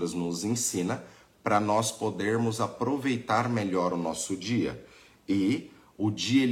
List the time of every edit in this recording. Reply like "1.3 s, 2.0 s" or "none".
none

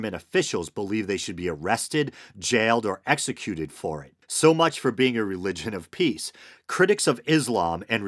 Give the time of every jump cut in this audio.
4.2 s, 6.6 s

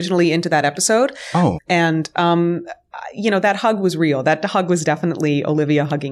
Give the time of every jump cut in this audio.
1.6 s

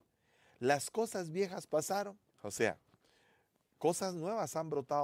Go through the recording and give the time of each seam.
2.3 s

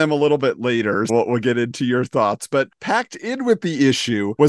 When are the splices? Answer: 1.1 s

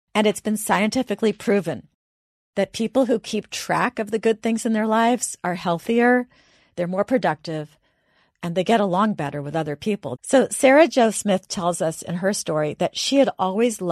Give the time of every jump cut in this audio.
10.2 s

